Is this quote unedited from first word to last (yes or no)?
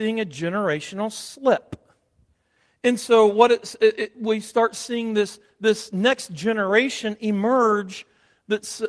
yes